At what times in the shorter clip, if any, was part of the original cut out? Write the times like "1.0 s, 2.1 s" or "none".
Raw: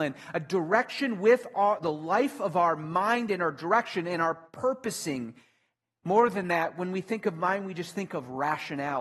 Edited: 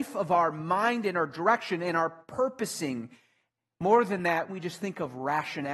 4.5 s